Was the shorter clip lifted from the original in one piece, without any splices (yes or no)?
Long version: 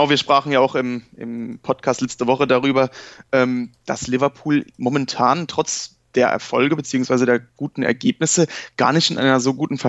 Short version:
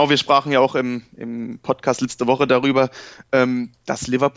yes